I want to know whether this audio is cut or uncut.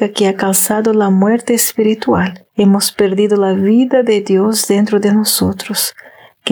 cut